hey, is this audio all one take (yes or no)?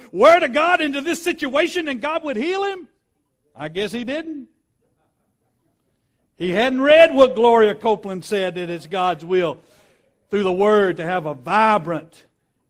yes